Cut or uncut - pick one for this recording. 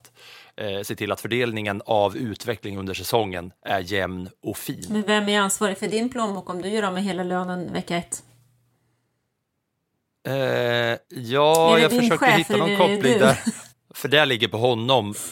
cut